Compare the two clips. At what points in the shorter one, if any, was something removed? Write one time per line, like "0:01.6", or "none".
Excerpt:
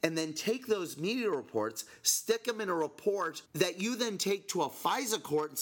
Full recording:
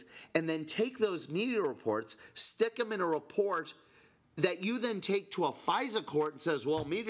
0:03.4